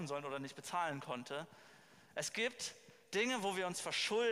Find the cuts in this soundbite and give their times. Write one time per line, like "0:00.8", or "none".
none